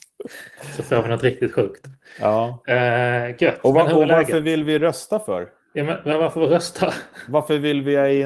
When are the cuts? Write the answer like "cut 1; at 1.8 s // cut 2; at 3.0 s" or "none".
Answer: none